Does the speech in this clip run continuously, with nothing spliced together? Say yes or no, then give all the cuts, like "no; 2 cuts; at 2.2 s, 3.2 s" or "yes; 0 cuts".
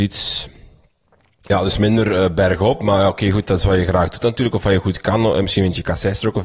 yes; 0 cuts